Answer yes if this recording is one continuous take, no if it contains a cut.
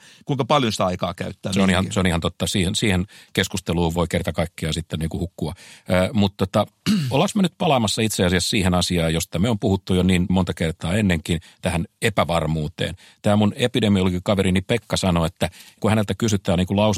yes